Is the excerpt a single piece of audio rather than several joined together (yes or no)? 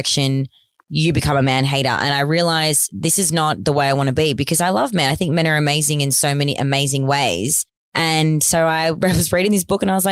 yes